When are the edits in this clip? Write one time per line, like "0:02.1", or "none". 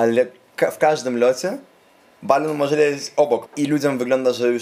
0:03.5